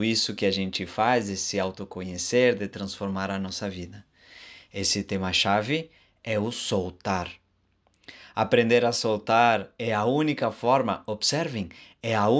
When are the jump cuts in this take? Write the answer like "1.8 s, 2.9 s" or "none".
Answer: none